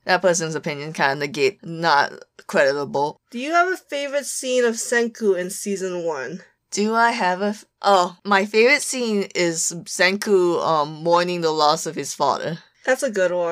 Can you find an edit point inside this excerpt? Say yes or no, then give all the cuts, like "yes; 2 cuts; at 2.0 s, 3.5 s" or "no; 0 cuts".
no; 0 cuts